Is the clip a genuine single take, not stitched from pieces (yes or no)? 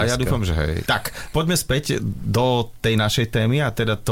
no